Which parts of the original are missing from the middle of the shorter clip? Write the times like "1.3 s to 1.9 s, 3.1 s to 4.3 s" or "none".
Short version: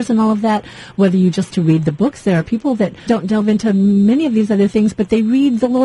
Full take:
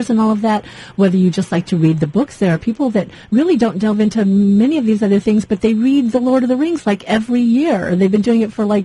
1.5 s to 1.6 s, 3.2 s to 3.6 s

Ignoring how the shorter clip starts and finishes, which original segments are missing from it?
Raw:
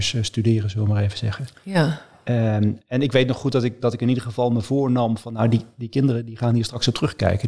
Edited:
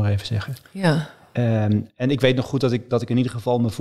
none

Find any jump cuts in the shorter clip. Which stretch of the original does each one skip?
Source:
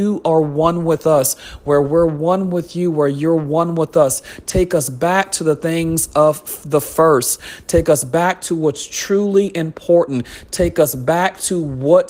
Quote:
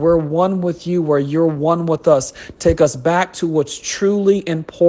4.4 s to 7.6 s

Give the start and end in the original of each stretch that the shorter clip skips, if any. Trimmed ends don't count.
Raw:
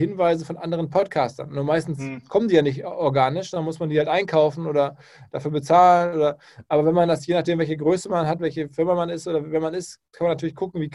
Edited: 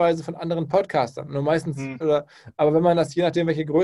2.2 s to 6.1 s

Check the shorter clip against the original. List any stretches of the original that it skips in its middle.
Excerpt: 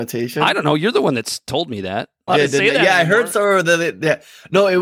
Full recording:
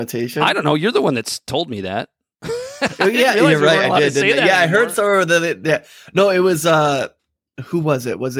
2.3 s to 3.9 s

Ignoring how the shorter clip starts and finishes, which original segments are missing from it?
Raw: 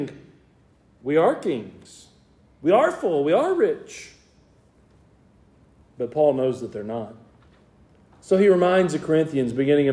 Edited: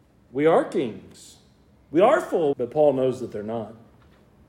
3.2 s to 5.9 s

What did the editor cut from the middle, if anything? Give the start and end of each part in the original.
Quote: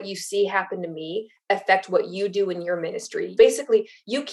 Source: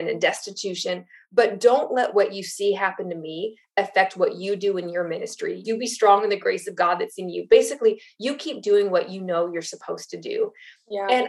5.6 s to 7.5 s

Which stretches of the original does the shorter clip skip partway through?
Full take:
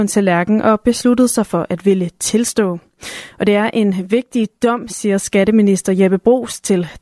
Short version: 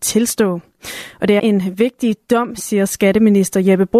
3.6 s to 3.7 s

